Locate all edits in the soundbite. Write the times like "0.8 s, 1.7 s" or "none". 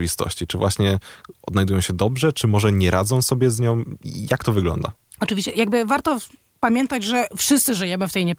none